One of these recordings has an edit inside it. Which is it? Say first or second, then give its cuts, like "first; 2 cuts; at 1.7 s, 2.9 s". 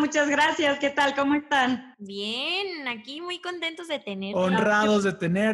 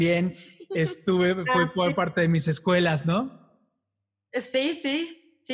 first; 1 cut; at 1.9 s